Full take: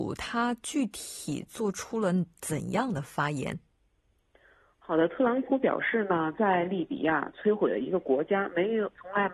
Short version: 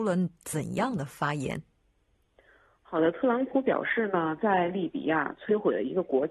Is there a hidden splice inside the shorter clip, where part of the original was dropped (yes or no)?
no